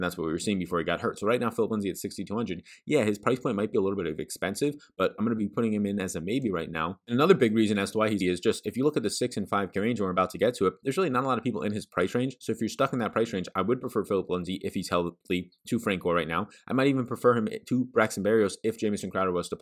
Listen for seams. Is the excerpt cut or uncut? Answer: cut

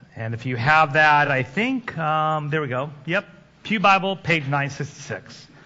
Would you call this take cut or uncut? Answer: uncut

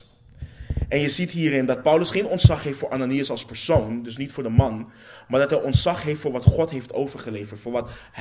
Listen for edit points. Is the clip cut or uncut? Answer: uncut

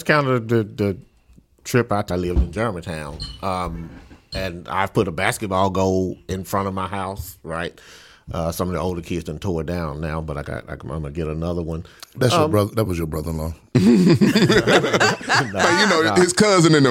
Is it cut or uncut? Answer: cut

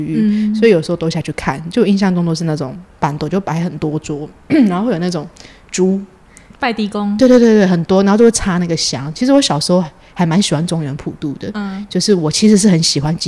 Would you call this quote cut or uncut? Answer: uncut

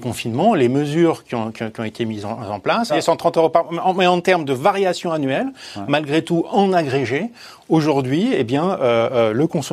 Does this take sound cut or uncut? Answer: cut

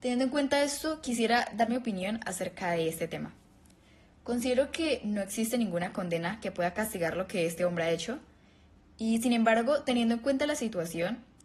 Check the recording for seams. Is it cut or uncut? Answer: uncut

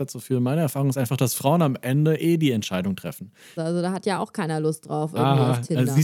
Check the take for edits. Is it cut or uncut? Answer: cut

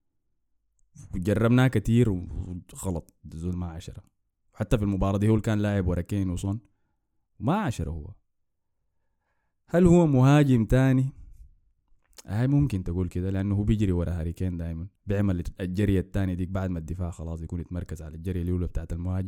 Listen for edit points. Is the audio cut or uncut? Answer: cut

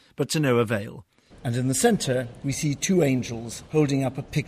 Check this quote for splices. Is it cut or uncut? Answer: cut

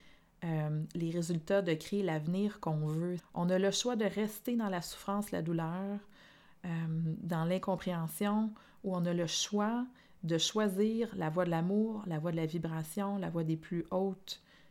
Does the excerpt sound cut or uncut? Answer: cut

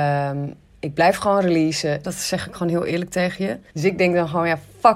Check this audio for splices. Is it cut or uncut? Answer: cut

